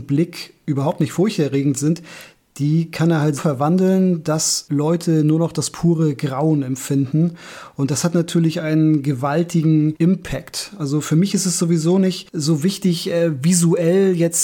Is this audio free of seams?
no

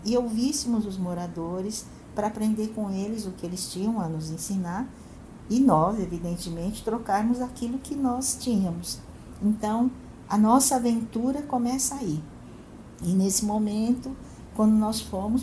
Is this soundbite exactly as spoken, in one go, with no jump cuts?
yes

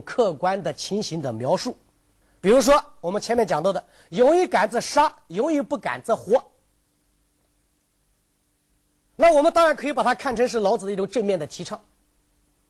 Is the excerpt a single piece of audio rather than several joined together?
yes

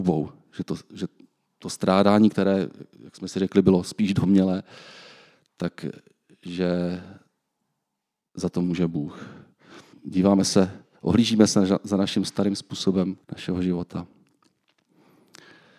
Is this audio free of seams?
no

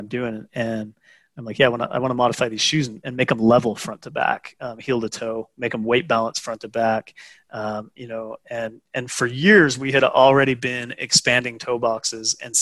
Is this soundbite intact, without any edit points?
yes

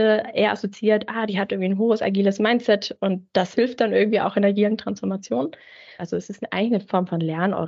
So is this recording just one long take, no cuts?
no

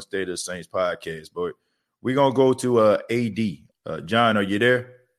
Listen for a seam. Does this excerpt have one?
yes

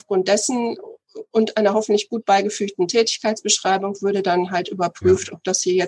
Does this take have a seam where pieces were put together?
no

